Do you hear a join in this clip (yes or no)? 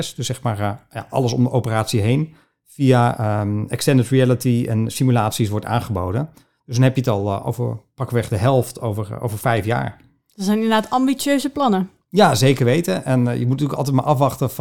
no